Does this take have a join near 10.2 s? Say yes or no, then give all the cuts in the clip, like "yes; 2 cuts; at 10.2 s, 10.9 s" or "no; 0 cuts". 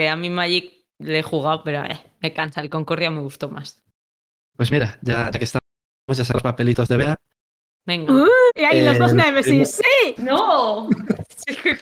yes; 2 cuts; at 8.5 s, 10.2 s